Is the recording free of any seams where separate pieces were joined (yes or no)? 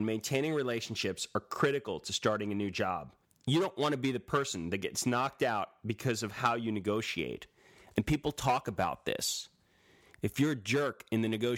yes